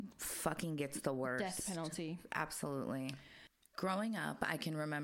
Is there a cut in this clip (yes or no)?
yes